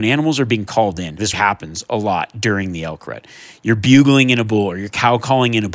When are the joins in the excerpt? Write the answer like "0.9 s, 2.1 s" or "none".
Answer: 1.3 s